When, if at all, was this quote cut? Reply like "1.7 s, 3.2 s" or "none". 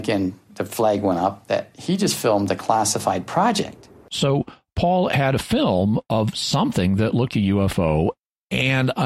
7.3 s